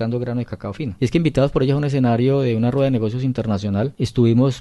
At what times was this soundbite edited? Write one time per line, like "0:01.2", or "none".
0:01.0